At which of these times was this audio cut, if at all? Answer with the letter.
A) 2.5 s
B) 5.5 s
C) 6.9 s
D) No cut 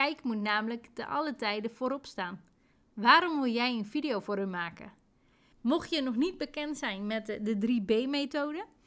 B